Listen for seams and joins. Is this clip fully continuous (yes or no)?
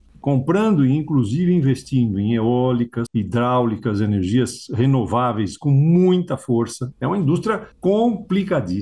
no